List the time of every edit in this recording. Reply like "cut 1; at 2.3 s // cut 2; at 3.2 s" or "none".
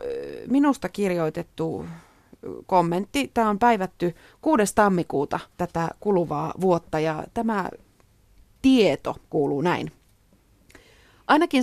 cut 1; at 5.5 s

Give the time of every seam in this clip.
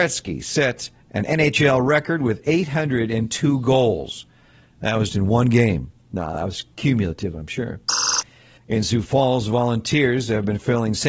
cut 1; at 5.1 s // cut 2; at 8.6 s

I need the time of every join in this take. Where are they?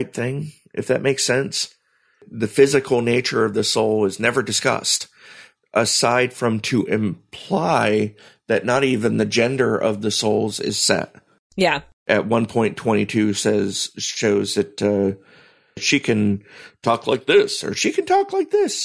none

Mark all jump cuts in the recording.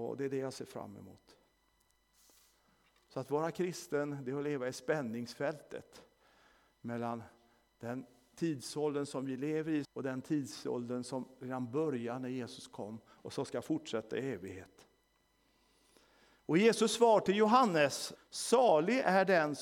cut 1; at 9.8 s // cut 2; at 18.2 s

